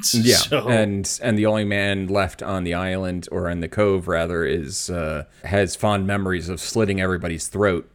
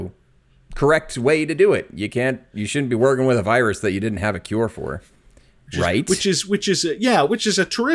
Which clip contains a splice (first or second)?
first